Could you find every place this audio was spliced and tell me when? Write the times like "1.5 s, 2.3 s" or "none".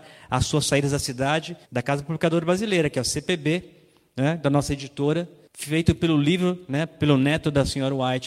1.6 s